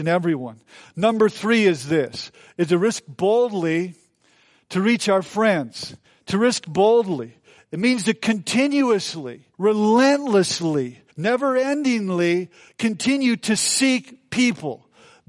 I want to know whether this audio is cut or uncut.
cut